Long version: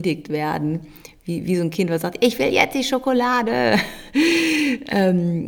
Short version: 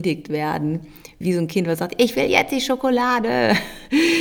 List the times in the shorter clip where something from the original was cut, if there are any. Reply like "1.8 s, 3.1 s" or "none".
1.2 s